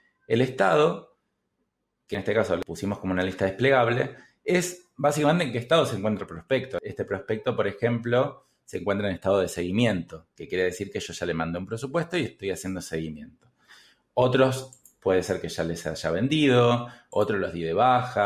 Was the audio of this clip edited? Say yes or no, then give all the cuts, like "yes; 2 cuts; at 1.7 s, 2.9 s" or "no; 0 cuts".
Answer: no; 0 cuts